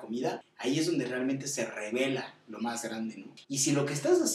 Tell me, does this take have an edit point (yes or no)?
yes